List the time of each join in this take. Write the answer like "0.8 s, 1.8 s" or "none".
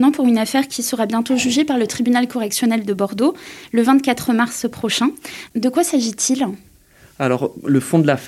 none